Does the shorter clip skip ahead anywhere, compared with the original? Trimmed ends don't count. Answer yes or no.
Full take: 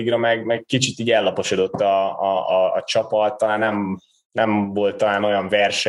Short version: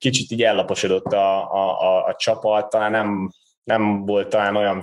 no